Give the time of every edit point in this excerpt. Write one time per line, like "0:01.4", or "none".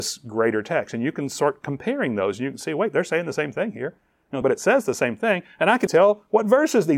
0:04.4
0:05.9